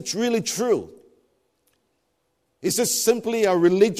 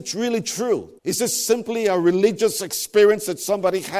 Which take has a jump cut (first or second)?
second